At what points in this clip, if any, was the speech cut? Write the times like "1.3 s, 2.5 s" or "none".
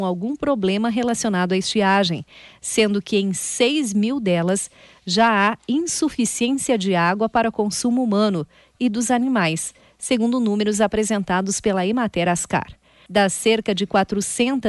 13.1 s